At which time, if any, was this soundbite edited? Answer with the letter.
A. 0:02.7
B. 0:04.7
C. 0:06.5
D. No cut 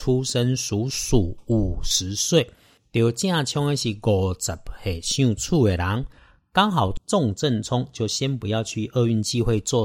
D